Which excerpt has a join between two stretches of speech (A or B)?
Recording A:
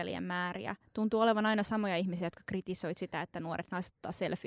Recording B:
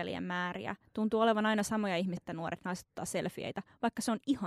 B